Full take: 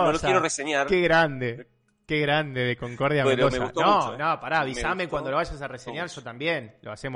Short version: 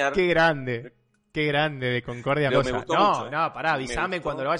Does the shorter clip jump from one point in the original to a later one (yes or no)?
yes